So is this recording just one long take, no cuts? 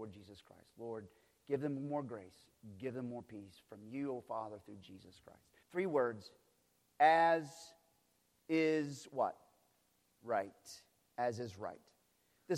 no; 1 cut; at 5.6 s

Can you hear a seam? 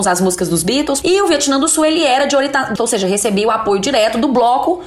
yes; 2 cuts; at 1.0 s, 2.8 s

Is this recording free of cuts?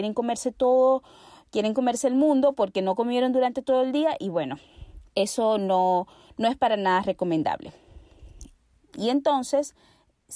no; 2 cuts; at 5.1 s, 8.7 s

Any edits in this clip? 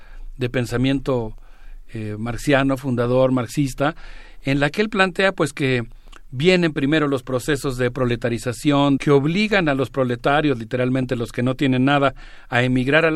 yes; 1 cut; at 9.0 s

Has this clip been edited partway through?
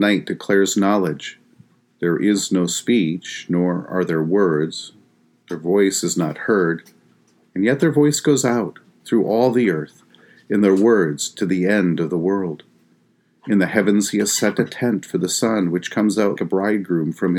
yes; 1 cut; at 16.4 s

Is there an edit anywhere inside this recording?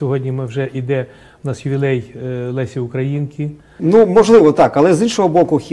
yes; 1 cut; at 3.8 s

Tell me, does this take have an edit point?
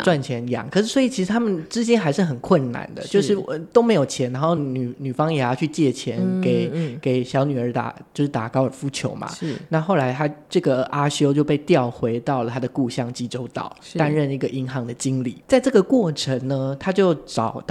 no; 0 cuts

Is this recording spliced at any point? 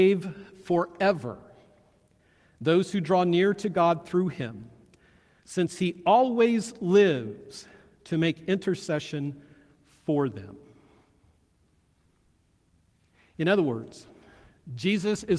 no; 0 cuts

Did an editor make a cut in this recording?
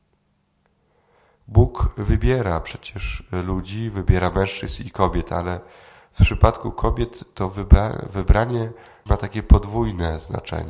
yes; 1 cut; at 9.1 s

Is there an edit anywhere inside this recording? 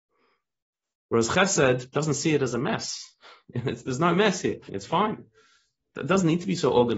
yes; 1 cut; at 4.7 s

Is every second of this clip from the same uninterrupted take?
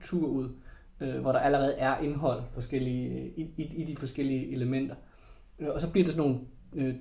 yes; 0 cuts

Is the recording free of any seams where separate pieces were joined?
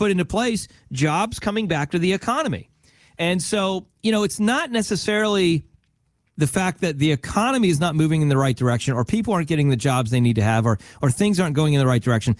yes; 0 cuts

